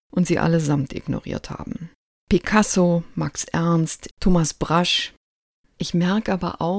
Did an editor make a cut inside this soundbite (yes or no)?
yes